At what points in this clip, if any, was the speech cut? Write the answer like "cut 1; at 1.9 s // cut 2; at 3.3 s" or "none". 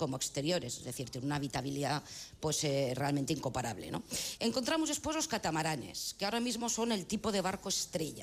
cut 1; at 4.4 s